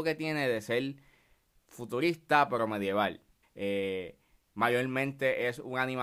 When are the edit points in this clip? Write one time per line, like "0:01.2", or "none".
0:03.4